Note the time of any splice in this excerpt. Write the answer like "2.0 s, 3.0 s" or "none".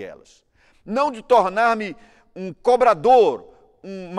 none